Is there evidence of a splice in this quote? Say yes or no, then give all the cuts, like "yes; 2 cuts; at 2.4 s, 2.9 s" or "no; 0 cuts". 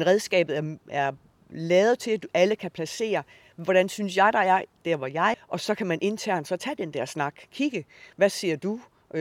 yes; 1 cut; at 5.3 s